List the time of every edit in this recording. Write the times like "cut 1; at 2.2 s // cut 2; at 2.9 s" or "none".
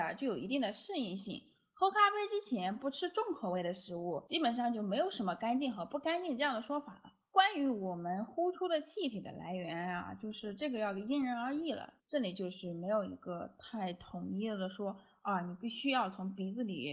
cut 1; at 12.0 s